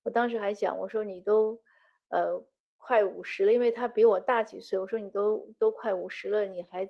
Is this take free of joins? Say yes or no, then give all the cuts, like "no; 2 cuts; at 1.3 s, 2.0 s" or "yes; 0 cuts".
yes; 0 cuts